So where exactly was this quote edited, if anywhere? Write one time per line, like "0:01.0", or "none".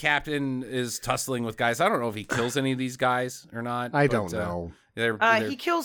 none